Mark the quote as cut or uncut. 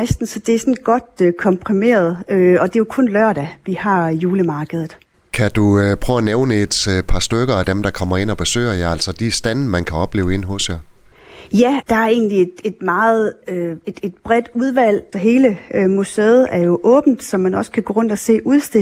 cut